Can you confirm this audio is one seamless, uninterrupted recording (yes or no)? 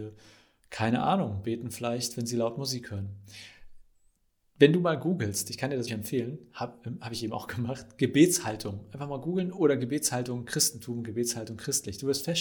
no